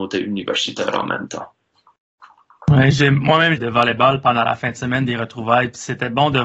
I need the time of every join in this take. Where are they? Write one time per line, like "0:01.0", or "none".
0:03.6